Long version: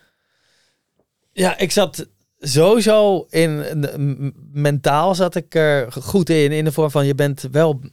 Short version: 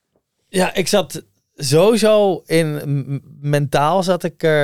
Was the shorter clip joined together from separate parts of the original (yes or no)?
yes